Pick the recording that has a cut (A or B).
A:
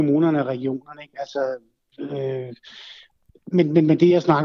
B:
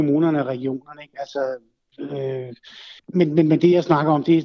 B